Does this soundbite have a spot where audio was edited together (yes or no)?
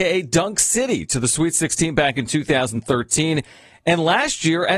no